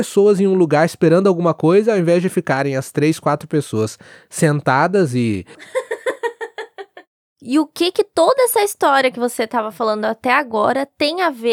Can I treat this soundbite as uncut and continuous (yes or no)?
no